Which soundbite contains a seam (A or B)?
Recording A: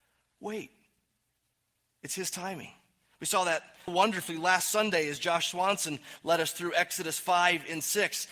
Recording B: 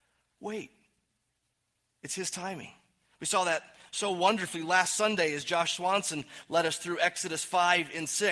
A